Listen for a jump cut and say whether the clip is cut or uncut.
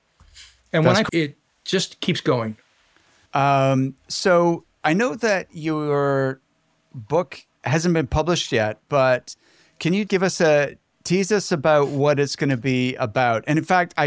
cut